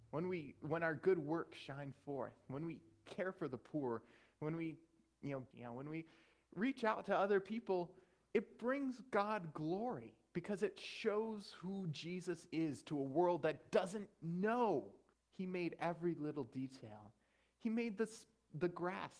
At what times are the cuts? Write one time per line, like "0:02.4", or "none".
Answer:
0:05.5
0:15.1